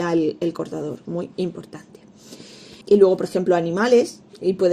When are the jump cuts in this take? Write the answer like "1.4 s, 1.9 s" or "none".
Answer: 1.1 s, 2.8 s